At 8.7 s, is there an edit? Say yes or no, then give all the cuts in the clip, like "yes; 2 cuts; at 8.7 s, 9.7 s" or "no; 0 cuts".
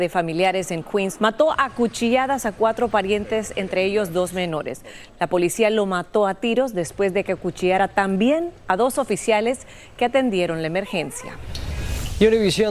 no; 2 cuts; at 1.2 s, 5.1 s